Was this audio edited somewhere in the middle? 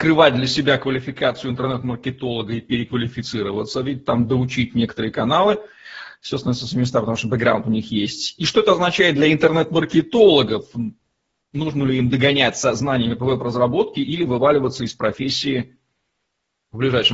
no; 0 cuts

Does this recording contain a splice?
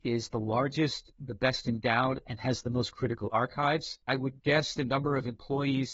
yes; 2 cuts; at 1.2 s, 4.0 s

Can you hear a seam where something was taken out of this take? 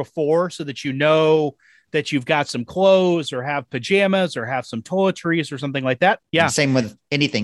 yes; 1 cut; at 6.2 s

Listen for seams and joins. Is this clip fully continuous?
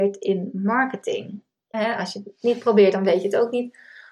no; 1 cut; at 1.7 s

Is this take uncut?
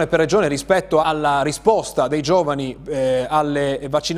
no; 1 cut; at 1.0 s

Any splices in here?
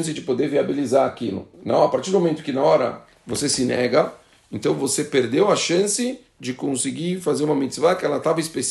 yes; 1 cut; at 1.5 s

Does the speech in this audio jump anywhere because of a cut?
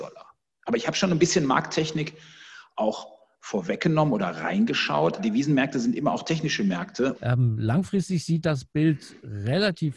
yes; 2 cuts; at 5.2 s, 7.1 s

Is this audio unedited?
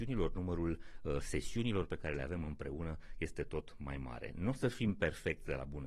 yes; 0 cuts

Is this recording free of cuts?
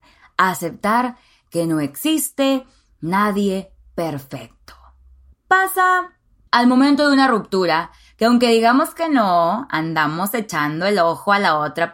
yes; 0 cuts

